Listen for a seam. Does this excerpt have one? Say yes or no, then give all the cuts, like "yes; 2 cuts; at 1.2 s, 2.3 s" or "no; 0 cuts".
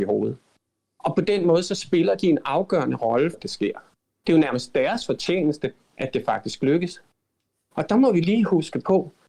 yes; 1 cut; at 3.3 s